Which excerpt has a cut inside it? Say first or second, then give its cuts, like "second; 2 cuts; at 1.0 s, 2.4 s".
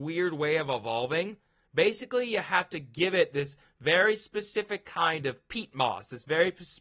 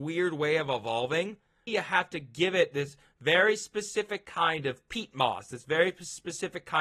second; 1 cut; at 1.7 s